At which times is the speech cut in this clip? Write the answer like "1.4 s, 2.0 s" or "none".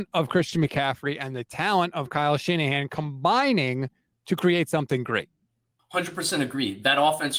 none